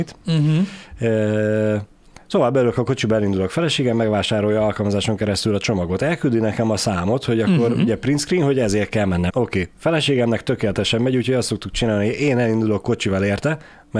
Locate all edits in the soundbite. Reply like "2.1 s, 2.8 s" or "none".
9.3 s